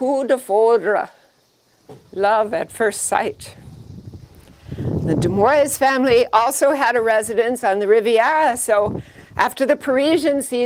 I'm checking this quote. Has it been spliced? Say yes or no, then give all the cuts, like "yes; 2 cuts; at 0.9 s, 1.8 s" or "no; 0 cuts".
no; 0 cuts